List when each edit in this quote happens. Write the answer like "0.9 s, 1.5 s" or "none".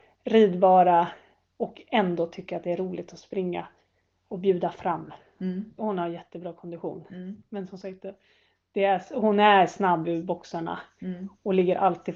5.8 s